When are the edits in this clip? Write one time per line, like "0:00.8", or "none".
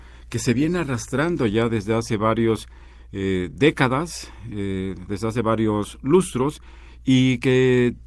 none